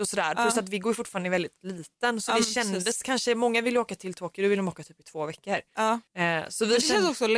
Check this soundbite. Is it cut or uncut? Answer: uncut